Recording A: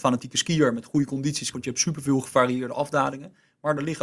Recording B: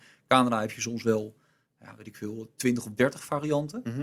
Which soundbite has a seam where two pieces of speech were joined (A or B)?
A